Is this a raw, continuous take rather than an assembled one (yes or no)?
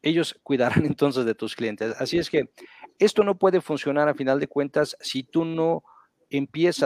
yes